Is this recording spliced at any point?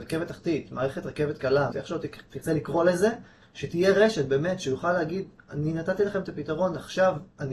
yes; 1 cut; at 1.7 s

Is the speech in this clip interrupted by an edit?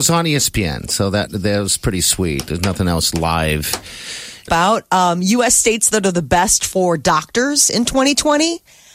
yes; 1 cut; at 4.5 s

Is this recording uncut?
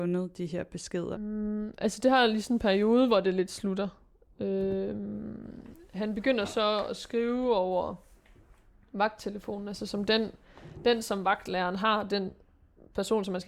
no; 1 cut; at 1.1 s

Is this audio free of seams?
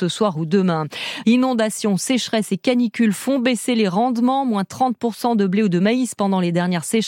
no; 1 cut; at 1.2 s

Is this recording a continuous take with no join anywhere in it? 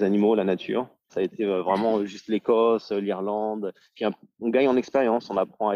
no; 1 cut; at 1.1 s

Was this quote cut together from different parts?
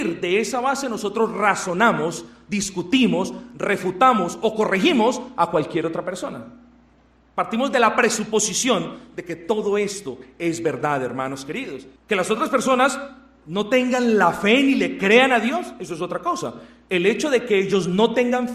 yes; 1 cut; at 12.0 s

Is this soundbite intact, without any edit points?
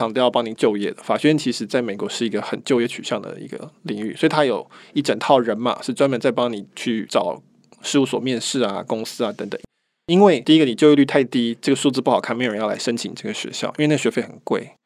yes; 0 cuts

